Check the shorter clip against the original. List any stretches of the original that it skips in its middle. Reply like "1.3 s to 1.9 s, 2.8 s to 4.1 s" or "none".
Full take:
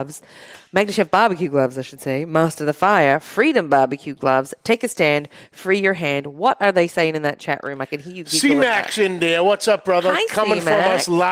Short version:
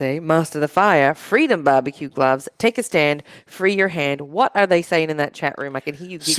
none